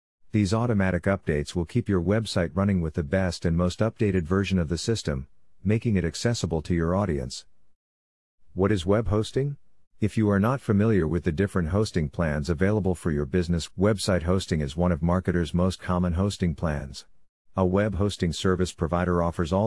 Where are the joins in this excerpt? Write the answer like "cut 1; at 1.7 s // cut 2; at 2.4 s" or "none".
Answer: cut 1; at 13.7 s // cut 2; at 17.4 s